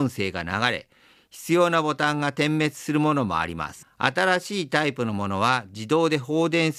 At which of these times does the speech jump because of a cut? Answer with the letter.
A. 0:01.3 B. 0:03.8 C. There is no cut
B